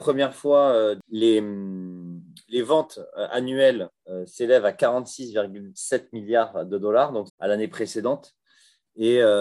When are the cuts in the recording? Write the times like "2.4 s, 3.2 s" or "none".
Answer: 7.3 s